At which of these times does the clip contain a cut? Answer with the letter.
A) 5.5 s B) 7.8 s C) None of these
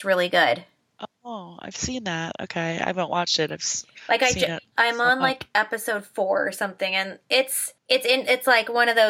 B